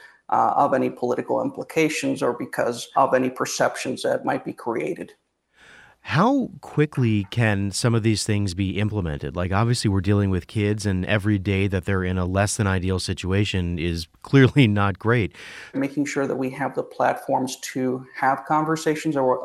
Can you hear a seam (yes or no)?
yes